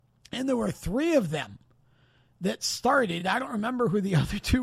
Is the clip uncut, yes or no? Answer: yes